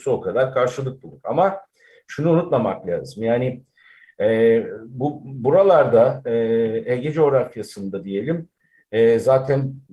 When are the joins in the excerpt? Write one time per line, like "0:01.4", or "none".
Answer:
none